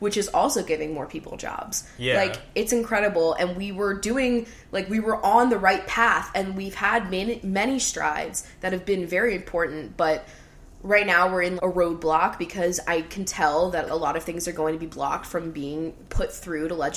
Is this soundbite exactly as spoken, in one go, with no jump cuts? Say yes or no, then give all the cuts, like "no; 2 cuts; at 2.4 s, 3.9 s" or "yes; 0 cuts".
no; 2 cuts; at 11.6 s, 13.9 s